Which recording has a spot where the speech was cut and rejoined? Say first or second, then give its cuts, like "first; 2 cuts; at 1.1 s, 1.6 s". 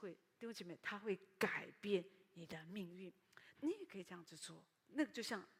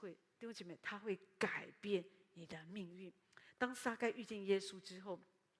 first; 1 cut; at 3.5 s